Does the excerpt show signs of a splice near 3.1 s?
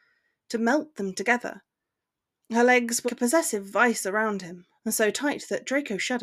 yes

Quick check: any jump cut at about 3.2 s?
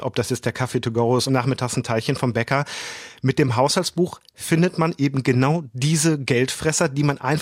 no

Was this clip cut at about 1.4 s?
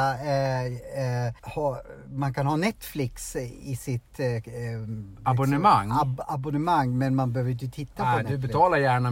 yes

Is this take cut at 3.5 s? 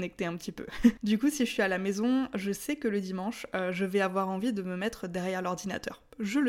no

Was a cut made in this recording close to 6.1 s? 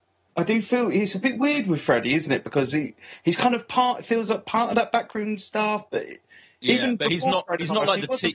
no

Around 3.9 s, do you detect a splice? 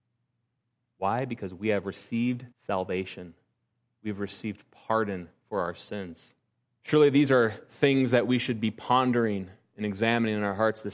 no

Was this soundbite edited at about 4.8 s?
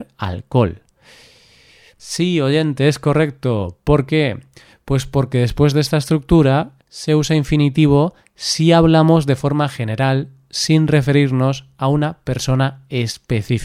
no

